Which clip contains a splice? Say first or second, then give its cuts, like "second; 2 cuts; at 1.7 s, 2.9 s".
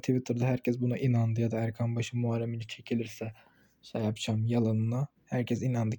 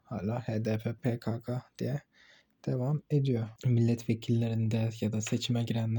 second; 2 cuts; at 1.0 s, 3.6 s